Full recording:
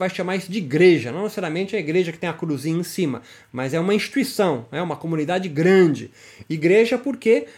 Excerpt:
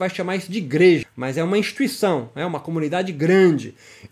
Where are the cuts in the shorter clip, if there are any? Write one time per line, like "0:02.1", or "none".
0:01.0